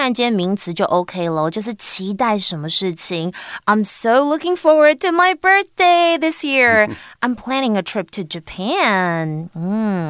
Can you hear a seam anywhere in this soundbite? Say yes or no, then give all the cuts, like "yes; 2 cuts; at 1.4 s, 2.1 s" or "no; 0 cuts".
no; 0 cuts